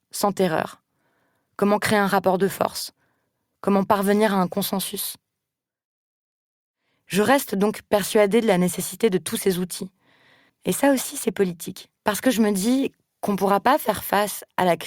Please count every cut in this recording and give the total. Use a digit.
2